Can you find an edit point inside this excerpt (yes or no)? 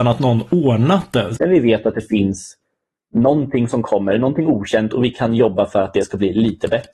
yes